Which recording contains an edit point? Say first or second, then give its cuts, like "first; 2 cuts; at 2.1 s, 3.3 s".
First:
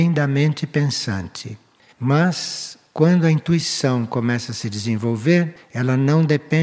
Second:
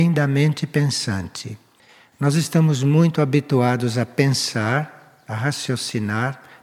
first; 1 cut; at 1.9 s